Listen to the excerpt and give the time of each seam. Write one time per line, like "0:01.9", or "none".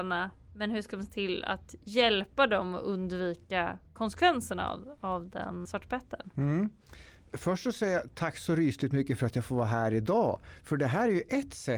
0:05.7